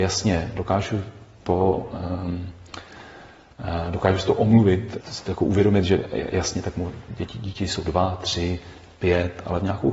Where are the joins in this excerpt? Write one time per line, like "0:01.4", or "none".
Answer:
0:05.0